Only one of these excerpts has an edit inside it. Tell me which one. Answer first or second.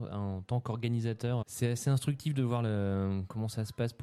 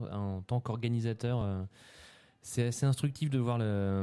first